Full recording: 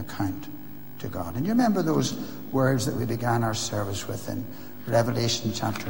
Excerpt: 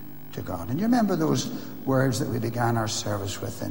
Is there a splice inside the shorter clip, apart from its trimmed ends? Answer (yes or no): no